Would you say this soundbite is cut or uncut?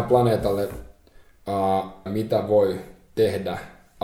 cut